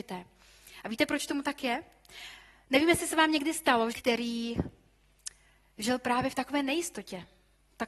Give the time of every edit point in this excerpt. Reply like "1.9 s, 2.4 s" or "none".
3.9 s